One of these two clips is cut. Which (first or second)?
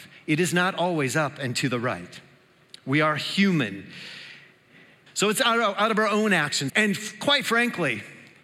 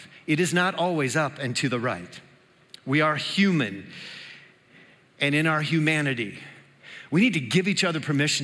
first